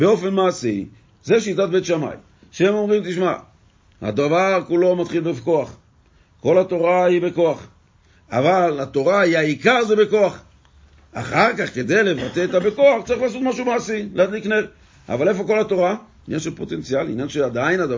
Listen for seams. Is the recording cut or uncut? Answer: cut